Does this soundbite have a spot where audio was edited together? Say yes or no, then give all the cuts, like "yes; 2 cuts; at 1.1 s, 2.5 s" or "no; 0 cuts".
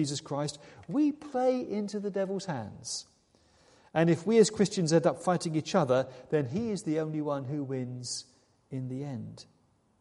no; 0 cuts